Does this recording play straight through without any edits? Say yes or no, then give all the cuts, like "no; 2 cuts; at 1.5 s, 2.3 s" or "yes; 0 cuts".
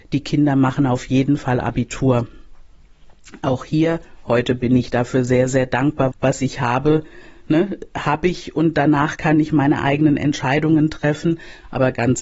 no; 1 cut; at 6.1 s